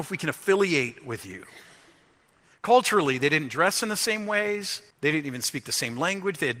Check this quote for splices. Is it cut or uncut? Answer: cut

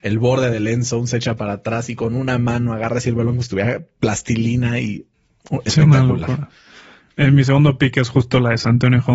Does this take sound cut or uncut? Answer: uncut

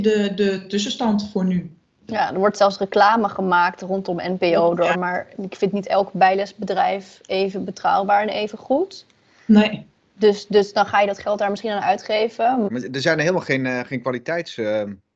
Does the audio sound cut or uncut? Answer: cut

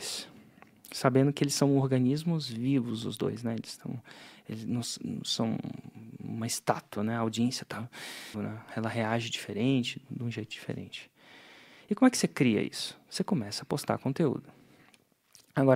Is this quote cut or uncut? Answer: cut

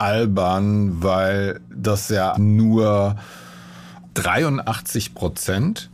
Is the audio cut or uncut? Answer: cut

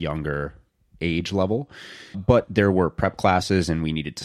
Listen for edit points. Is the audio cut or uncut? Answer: cut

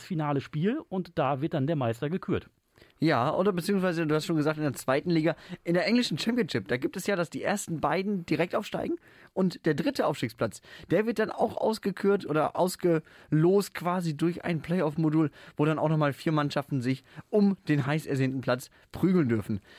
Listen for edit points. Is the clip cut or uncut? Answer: uncut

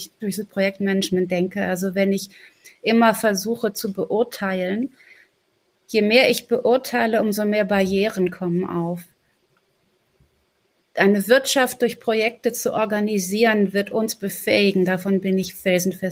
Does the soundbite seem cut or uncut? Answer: uncut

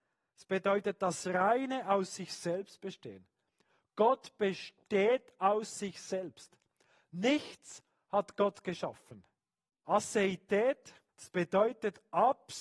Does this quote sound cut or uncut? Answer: cut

